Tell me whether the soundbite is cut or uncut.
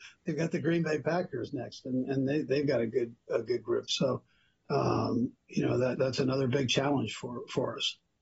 cut